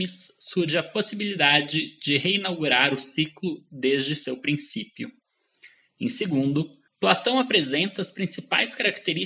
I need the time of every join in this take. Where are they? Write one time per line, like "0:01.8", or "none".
0:06.9